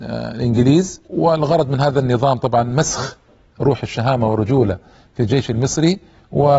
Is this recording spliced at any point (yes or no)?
yes